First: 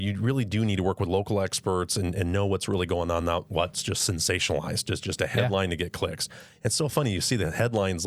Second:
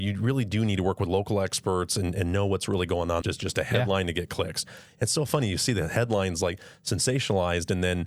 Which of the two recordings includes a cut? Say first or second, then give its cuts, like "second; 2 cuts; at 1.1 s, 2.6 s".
second; 1 cut; at 3.2 s